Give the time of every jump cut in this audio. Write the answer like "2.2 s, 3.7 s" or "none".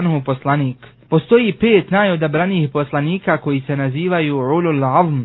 1.1 s